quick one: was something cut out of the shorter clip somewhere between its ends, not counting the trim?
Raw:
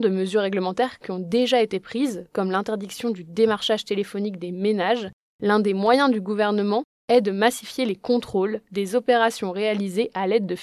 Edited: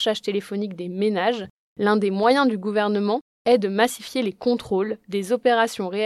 no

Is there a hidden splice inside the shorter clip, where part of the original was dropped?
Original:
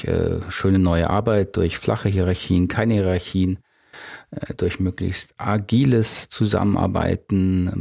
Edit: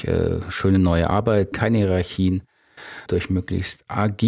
yes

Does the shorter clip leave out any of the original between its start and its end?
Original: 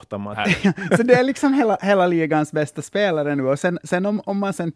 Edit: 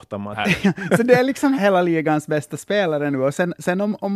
yes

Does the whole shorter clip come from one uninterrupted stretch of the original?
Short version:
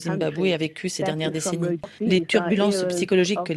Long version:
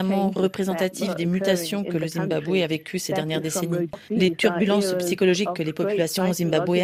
yes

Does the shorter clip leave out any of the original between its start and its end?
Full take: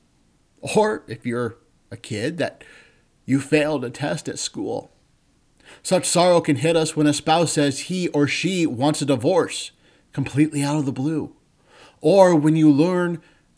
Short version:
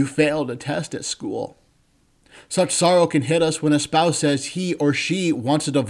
no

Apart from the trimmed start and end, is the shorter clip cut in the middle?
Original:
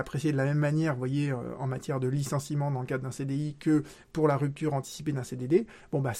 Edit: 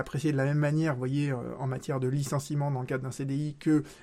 no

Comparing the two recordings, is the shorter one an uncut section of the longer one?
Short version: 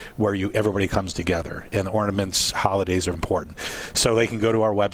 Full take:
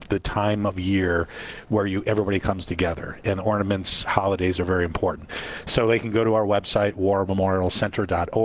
no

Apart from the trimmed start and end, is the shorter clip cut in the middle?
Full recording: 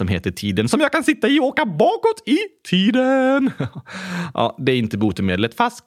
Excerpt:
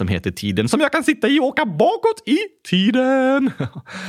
no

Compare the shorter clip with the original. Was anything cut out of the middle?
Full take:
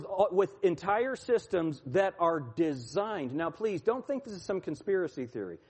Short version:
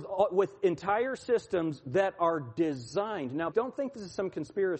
yes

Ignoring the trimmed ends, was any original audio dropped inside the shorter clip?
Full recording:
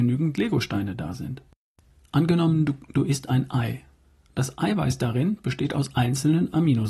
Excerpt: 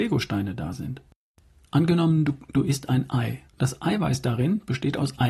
yes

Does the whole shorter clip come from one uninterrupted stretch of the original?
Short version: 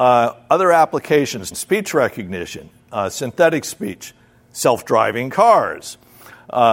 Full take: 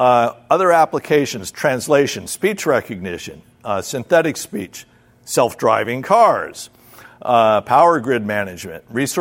no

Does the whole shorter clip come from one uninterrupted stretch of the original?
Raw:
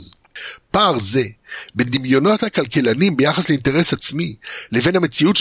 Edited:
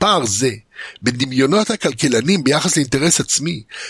yes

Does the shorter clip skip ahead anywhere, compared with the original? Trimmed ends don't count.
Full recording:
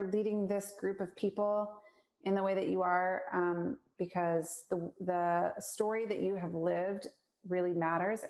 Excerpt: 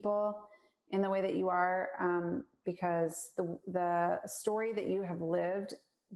no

